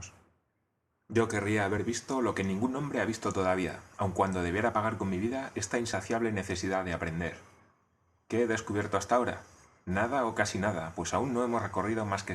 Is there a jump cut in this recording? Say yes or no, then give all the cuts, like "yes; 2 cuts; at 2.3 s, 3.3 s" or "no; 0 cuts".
no; 0 cuts